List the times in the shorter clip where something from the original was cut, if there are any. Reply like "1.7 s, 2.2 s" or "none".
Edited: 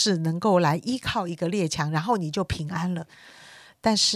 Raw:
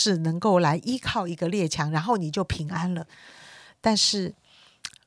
none